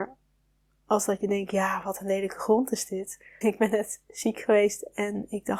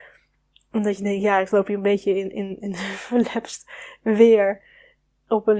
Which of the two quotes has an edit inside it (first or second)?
first